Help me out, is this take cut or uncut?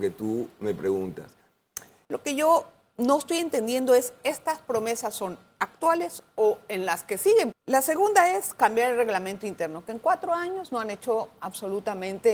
cut